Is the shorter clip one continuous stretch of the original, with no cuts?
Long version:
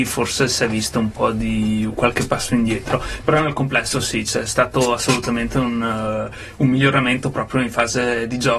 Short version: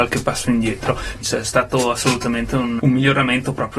no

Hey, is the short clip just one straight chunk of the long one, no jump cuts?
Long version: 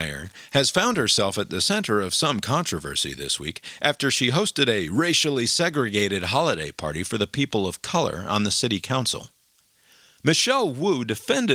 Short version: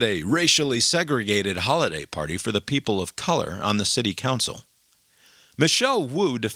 yes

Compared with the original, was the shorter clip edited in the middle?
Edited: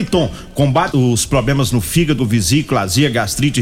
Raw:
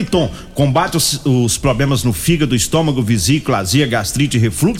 yes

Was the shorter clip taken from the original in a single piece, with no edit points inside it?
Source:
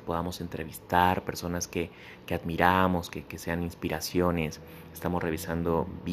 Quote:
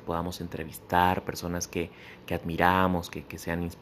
yes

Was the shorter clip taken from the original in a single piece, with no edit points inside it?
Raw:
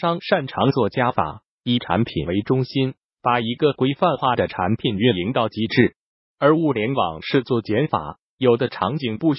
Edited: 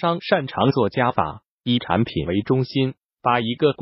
yes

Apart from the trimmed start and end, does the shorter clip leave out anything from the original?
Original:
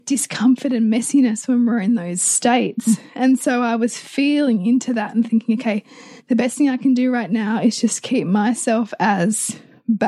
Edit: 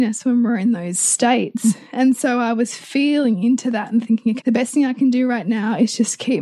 yes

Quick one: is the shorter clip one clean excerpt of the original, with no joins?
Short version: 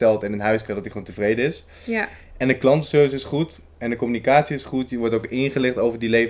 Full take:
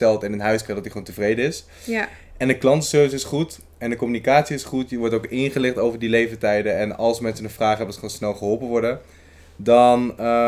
yes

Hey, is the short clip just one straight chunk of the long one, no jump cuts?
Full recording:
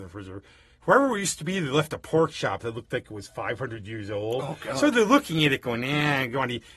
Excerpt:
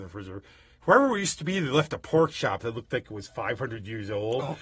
yes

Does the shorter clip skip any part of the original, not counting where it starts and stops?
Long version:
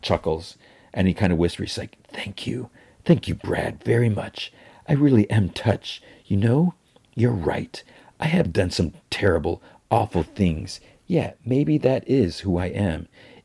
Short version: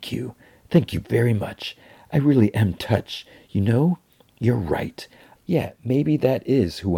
yes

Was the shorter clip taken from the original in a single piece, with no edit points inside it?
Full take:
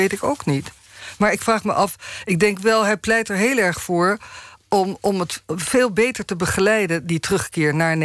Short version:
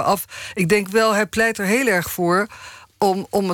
yes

